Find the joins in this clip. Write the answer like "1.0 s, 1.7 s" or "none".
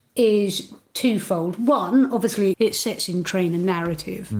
2.5 s